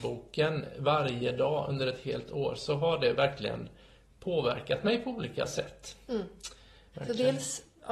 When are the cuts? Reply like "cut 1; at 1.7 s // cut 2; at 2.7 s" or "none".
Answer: cut 1; at 6.9 s